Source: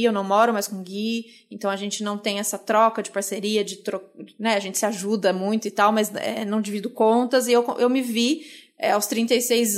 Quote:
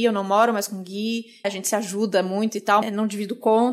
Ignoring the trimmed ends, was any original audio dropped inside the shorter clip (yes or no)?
yes